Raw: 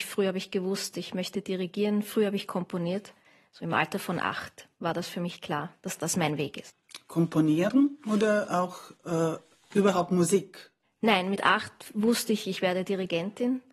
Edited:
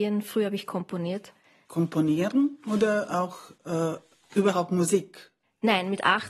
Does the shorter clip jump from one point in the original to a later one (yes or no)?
yes